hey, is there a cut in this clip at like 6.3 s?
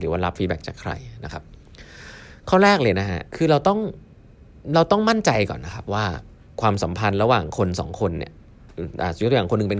no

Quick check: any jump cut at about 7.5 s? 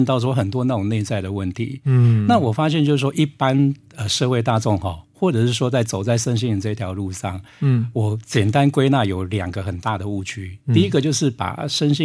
no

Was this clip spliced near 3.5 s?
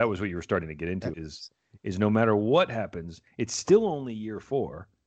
no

